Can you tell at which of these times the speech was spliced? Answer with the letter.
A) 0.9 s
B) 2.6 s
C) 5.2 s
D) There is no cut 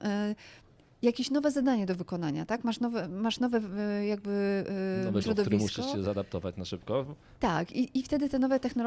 C